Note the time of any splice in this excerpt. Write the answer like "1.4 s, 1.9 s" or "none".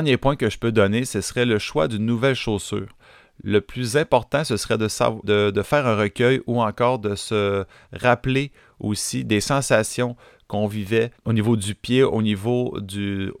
5.2 s, 11.1 s